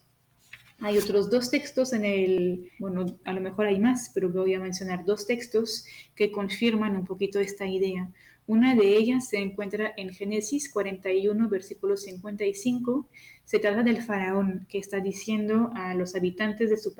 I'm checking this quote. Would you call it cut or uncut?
cut